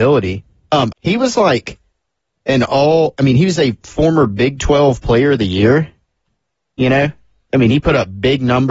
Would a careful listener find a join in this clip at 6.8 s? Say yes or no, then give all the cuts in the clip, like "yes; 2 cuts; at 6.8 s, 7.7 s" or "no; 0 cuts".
no; 1 cut; at 0.9 s